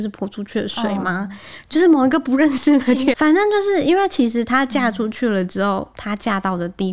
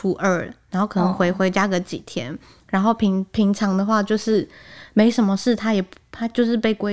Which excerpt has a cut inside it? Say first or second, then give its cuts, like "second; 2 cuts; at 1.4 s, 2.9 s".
first; 2 cuts; at 1.6 s, 3.1 s